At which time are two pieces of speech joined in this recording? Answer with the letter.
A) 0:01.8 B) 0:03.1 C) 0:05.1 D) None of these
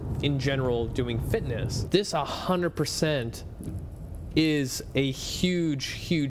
A